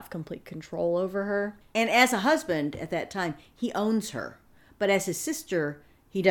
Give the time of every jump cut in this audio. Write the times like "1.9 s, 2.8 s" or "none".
none